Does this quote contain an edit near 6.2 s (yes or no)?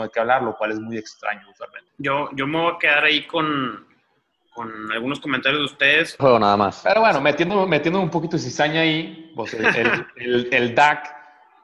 yes